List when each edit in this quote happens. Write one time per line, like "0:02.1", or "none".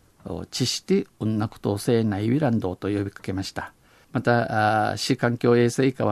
0:04.0